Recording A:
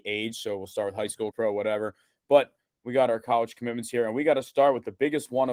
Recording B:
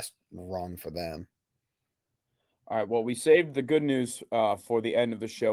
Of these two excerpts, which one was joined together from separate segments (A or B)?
A